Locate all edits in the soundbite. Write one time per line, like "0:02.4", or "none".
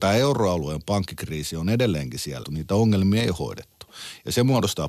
0:02.4